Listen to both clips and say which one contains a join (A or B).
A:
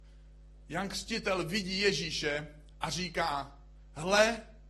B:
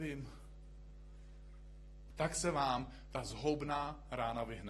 B